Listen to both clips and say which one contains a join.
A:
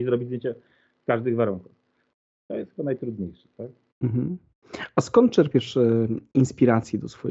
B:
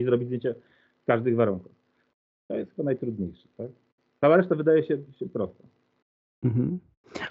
A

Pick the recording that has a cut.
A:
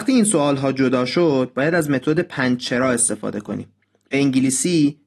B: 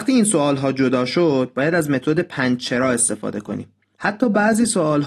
B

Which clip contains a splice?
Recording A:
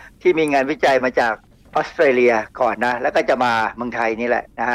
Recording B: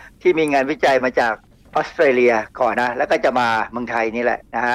B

